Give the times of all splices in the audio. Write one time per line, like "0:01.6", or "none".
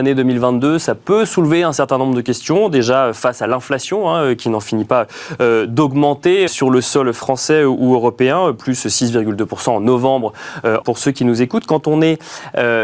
0:06.5
0:10.8